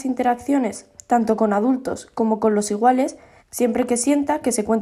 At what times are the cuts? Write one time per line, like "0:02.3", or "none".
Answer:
0:03.4